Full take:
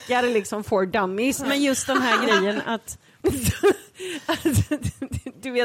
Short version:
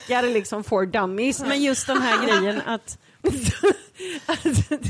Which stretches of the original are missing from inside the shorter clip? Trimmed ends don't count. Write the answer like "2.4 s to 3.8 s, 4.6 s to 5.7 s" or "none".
none